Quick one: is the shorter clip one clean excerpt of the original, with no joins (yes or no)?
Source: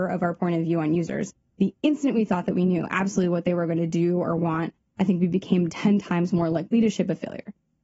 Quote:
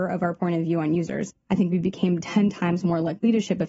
no